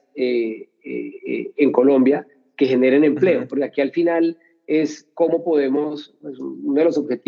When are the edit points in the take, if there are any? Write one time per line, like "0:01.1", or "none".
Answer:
none